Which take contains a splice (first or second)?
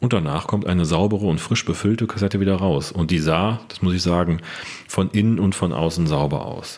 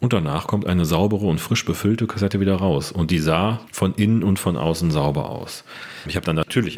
second